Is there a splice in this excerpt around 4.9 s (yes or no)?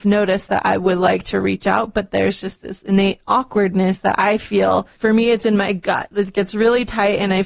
yes